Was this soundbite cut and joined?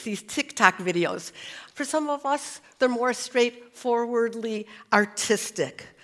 yes; 1 cut; at 1.7 s

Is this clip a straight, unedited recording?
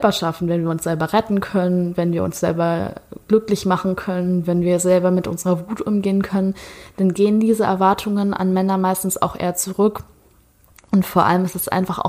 yes; 0 cuts

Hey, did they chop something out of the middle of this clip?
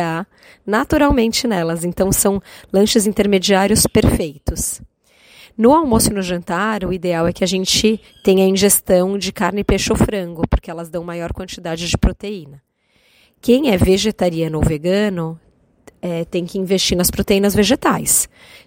no; 0 cuts

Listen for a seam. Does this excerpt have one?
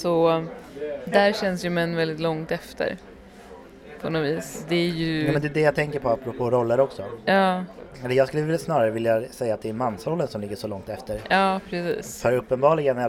no; 0 cuts

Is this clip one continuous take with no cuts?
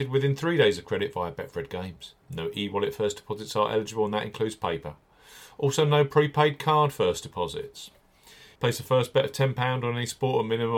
no; 2 cuts; at 2.2 s, 8.6 s

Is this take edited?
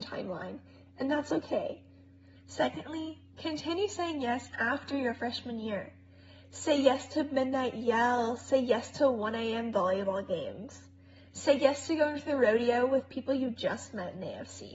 yes; 2 cuts; at 2.4 s, 4.5 s

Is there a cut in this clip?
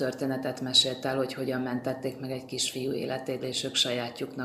yes; 1 cut; at 3.4 s

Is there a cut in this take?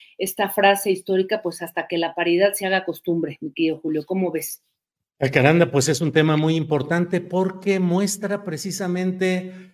no; 0 cuts

